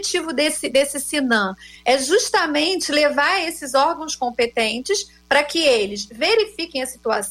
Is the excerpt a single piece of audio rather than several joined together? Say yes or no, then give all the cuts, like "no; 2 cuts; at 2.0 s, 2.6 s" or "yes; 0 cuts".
yes; 0 cuts